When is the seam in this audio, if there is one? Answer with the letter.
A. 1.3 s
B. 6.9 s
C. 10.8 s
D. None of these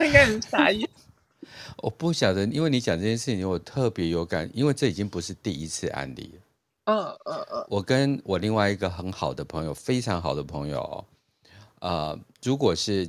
D